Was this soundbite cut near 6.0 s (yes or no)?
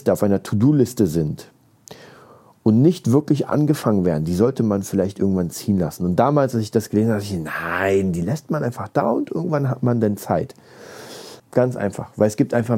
no